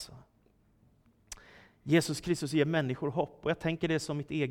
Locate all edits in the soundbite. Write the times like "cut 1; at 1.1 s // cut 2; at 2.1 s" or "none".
none